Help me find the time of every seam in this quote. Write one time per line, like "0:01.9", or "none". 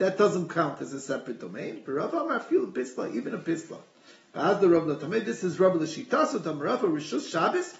none